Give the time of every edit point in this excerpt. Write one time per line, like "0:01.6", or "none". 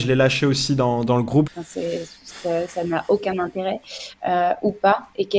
0:01.5
0:04.1